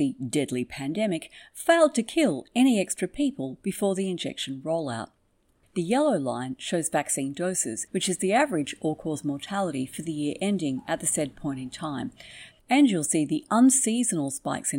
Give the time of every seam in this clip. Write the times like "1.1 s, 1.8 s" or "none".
5.7 s, 7.9 s, 12.5 s